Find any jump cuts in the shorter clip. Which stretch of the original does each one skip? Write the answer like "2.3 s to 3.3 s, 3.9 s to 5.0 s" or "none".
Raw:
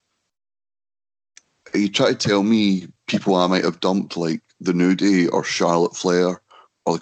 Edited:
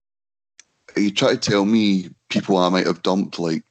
none